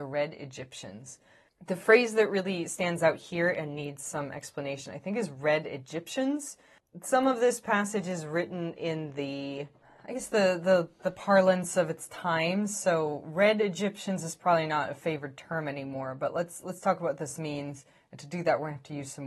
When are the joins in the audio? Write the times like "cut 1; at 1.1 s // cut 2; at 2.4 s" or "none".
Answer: none

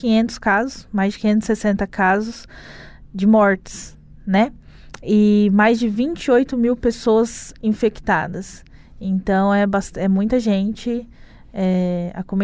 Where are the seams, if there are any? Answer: none

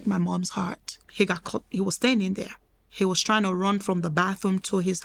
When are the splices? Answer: cut 1; at 1.1 s

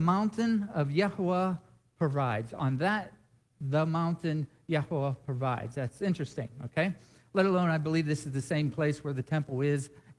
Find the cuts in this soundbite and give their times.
none

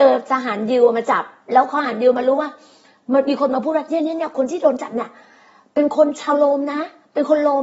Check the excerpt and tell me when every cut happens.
none

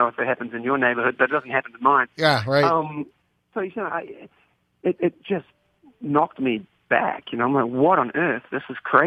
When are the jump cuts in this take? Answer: cut 1; at 3.5 s

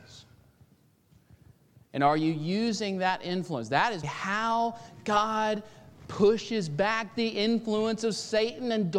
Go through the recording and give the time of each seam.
cut 1; at 4.0 s

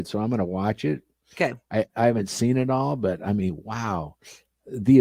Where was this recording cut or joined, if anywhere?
none

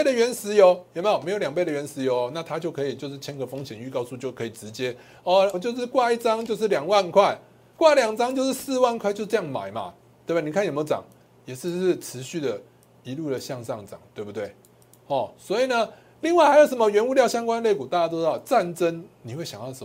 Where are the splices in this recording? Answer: cut 1; at 5.5 s

